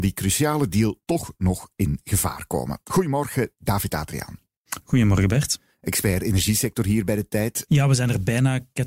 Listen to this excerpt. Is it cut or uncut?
cut